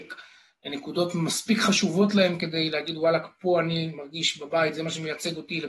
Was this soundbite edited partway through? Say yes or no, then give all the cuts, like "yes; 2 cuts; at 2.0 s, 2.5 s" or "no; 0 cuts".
no; 0 cuts